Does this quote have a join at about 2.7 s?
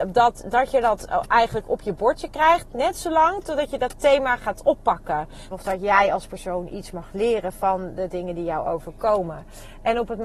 no; 1 cut; at 5.5 s

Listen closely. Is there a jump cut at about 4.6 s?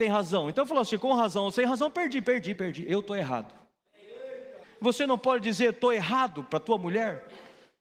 yes; 2 cuts; at 2.6 s, 4.6 s

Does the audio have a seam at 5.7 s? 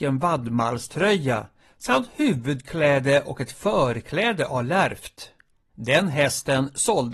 yes; 1 cut; at 5.7 s

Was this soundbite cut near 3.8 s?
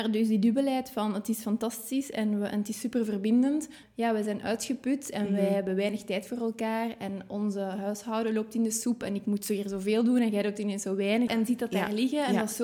yes; 2 cuts; at 3.8 s, 11.3 s

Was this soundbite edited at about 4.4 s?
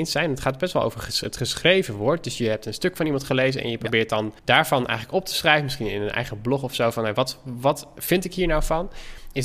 yes; 1 cut; at 4.4 s

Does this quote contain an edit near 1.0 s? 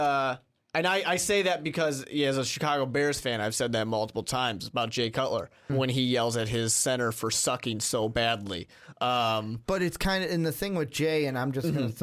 no; 1 cut; at 5.7 s

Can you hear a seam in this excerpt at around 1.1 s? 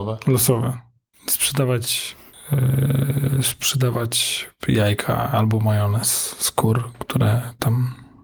yes; 1 cut; at 1.1 s

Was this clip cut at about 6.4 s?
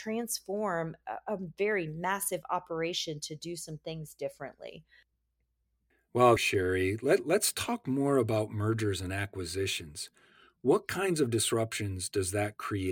yes; 1 cut; at 6.4 s

